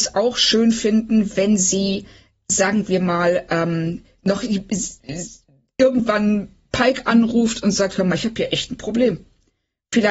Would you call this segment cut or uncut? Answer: uncut